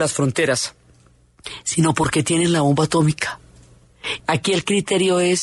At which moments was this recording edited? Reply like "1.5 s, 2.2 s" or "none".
4.2 s